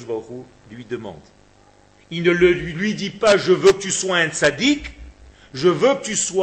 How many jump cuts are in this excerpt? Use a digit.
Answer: 0